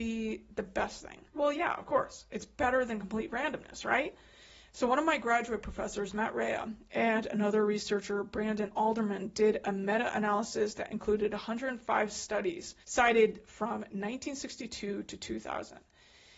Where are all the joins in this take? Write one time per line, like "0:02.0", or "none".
0:01.3
0:12.8